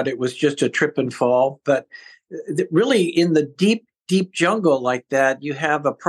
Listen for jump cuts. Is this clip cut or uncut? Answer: uncut